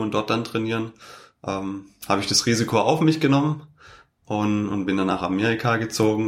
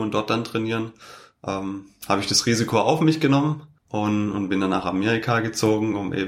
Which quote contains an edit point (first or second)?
second